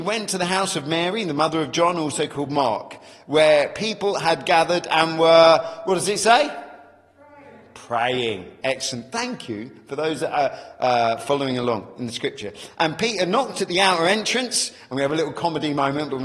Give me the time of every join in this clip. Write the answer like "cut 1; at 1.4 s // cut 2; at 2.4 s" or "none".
none